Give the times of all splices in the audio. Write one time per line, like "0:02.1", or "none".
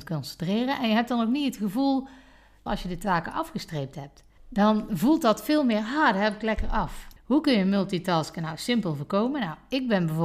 0:02.7
0:04.4
0:07.2